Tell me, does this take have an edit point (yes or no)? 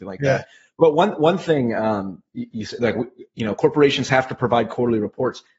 no